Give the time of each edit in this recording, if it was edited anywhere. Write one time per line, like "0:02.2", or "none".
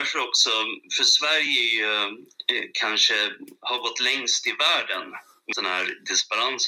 0:05.5